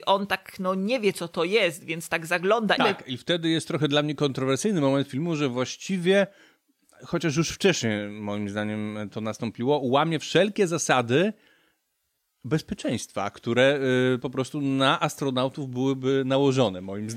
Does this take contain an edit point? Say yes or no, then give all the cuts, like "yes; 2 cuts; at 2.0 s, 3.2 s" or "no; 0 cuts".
yes; 1 cut; at 2.8 s